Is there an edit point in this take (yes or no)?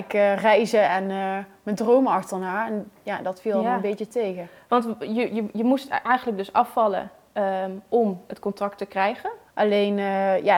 yes